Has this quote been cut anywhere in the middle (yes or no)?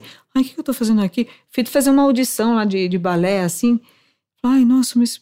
no